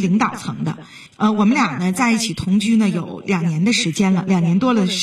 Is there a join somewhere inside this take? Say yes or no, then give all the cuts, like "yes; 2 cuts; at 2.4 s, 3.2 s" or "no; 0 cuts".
yes; 1 cut; at 1.1 s